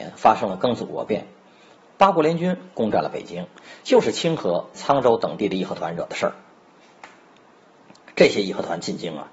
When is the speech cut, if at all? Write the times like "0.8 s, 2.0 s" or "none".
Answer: 4.7 s